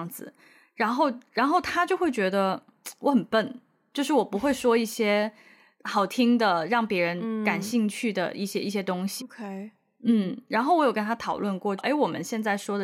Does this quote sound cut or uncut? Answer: cut